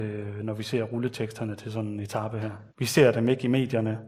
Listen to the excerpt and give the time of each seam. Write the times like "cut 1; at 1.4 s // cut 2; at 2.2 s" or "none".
cut 1; at 2.7 s